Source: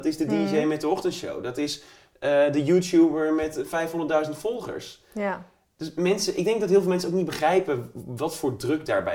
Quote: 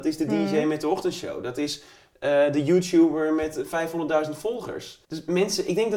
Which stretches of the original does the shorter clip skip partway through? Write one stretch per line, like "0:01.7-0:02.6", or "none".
0:05.0-0:05.7